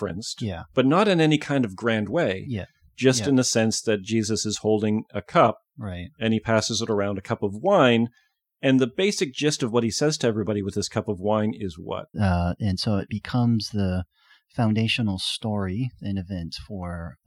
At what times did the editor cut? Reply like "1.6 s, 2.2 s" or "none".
12.1 s